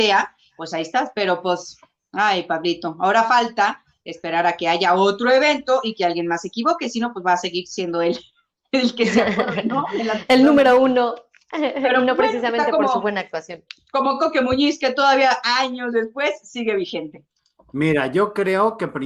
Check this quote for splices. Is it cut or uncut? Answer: uncut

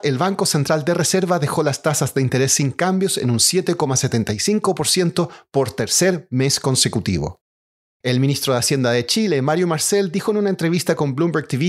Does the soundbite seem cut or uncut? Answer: uncut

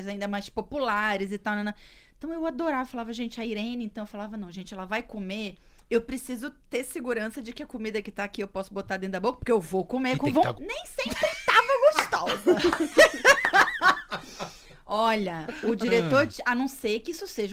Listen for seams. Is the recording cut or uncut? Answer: cut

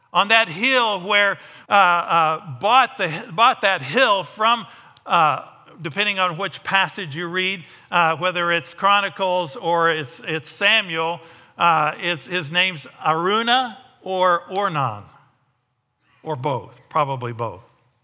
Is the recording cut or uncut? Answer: cut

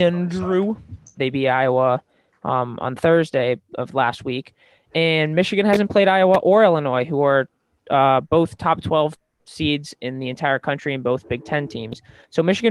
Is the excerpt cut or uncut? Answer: cut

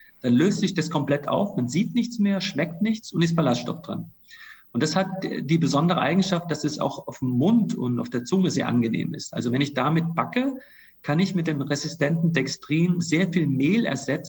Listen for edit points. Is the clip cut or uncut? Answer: uncut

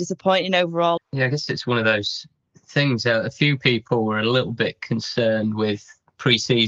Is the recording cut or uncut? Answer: cut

